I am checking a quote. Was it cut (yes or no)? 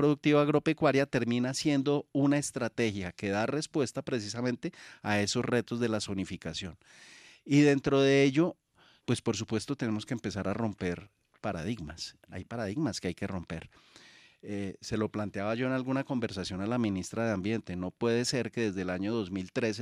yes